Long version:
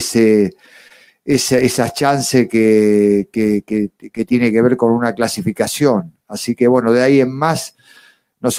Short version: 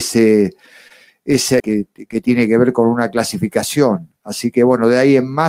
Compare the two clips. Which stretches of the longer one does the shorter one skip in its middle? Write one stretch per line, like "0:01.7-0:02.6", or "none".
0:01.6-0:03.6